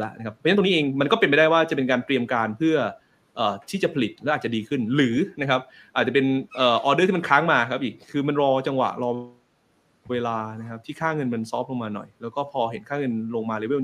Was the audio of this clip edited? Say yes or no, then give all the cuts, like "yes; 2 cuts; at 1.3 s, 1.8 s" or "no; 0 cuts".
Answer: yes; 1 cut; at 6.5 s